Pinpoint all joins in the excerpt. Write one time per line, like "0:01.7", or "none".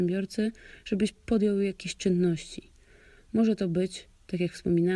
none